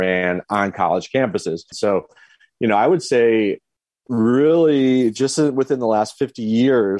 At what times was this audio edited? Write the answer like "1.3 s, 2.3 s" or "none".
1.7 s